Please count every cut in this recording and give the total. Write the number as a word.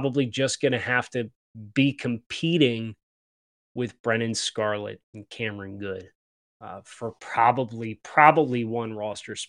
zero